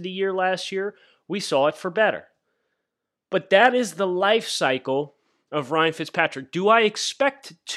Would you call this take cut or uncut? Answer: uncut